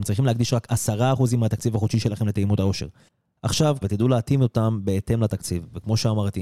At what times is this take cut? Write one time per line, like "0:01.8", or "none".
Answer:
0:03.8